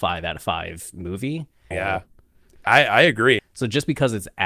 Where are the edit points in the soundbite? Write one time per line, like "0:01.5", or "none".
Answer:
0:01.7
0:03.4